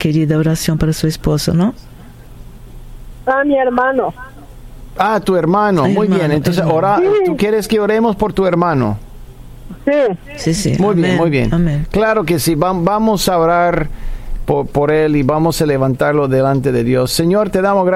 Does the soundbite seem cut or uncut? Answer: uncut